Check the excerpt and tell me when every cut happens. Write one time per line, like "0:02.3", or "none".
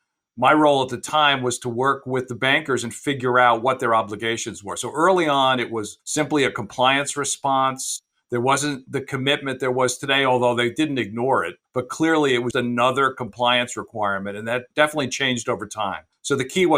0:12.5